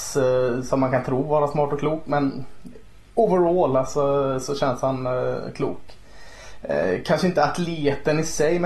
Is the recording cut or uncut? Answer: uncut